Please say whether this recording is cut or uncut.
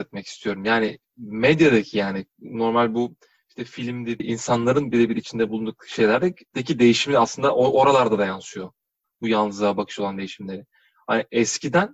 cut